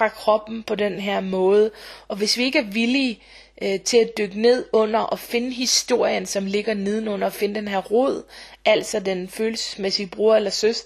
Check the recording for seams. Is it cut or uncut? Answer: uncut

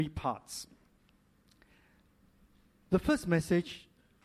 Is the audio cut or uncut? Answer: uncut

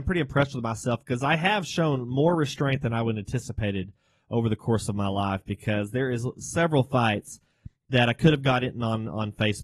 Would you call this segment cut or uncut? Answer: uncut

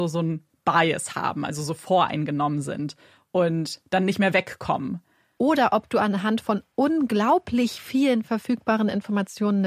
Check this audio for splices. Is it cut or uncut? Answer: cut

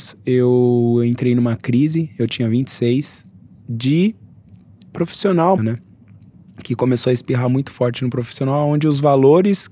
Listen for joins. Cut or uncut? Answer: cut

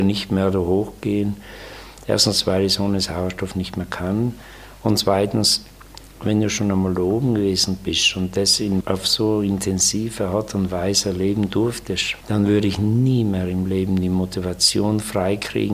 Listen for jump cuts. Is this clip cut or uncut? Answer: cut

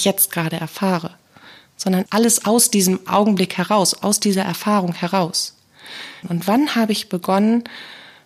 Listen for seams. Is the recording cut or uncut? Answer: cut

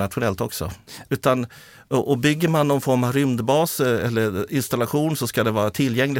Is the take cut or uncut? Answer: cut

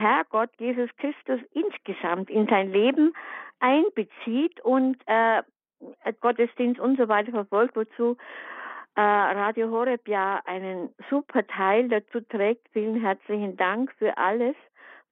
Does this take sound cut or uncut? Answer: cut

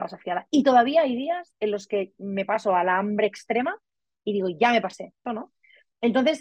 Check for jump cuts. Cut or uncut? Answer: cut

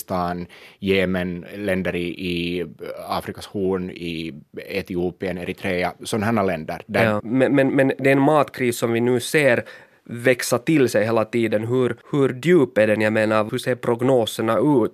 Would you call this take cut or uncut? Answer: cut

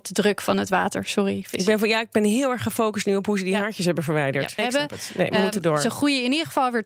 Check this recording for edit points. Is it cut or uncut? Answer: cut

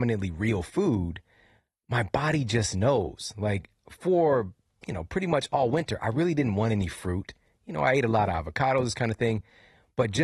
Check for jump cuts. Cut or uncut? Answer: uncut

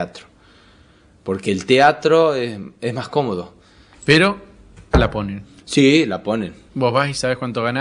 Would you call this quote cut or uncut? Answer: cut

